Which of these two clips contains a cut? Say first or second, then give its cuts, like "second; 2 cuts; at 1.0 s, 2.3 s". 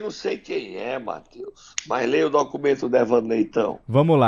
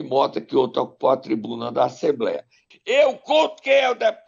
second; 1 cut; at 2.7 s